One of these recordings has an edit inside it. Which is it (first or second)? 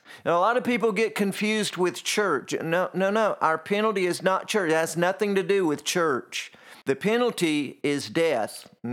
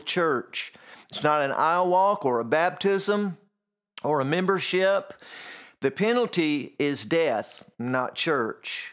first